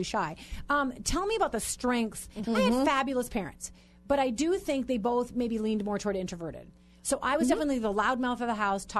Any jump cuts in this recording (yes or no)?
yes